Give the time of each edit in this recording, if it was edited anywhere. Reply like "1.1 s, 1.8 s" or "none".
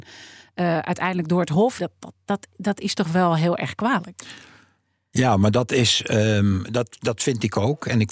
1.8 s